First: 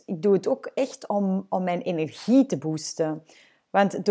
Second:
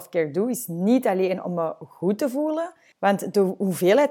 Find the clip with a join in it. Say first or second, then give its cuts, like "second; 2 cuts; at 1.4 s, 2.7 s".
second; 1 cut; at 2.9 s